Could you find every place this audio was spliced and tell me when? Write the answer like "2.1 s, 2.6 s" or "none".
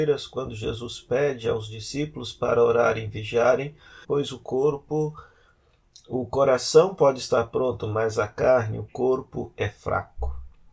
4.0 s